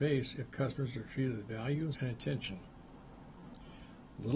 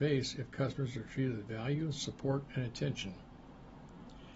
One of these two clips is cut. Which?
first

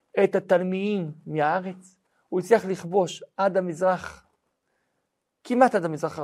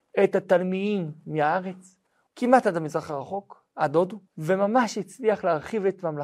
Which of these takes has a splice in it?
second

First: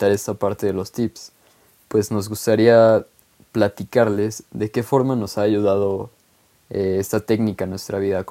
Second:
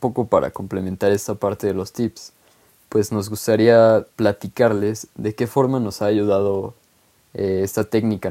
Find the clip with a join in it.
second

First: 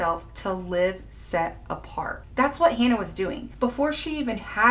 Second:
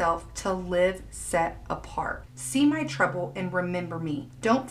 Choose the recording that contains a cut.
second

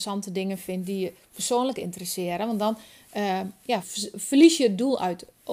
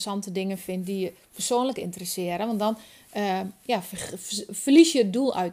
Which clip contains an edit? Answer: first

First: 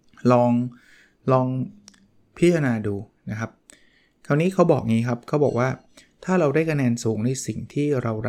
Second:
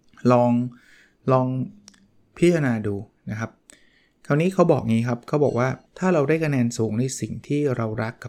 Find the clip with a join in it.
second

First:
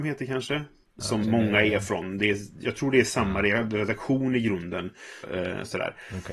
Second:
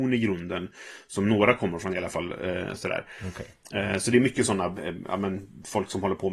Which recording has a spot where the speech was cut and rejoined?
first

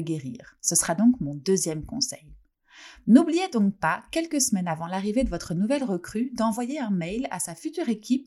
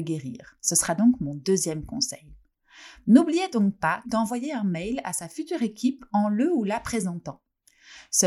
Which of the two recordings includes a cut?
second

